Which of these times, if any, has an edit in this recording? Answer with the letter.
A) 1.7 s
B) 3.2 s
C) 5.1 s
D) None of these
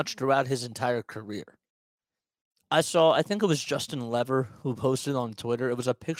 D